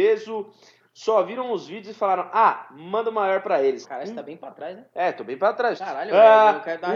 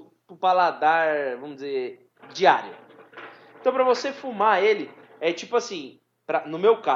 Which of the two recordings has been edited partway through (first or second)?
first